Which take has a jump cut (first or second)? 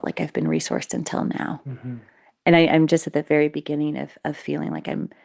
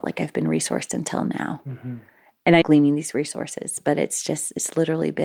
second